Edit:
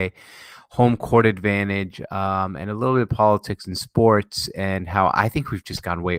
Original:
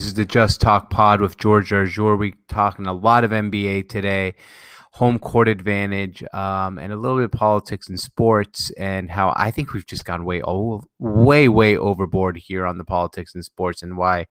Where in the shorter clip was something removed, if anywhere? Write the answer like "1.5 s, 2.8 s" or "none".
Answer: none